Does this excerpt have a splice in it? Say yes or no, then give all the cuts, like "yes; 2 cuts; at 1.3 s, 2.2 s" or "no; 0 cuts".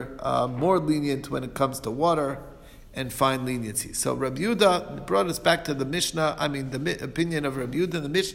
no; 0 cuts